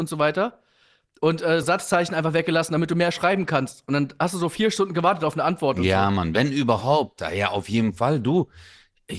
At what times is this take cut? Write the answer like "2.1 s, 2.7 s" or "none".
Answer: 1.6 s